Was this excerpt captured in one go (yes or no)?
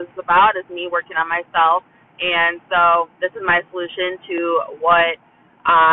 no